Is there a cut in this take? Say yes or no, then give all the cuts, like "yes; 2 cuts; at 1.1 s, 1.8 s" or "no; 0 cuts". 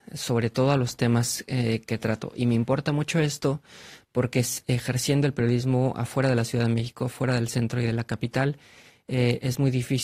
no; 0 cuts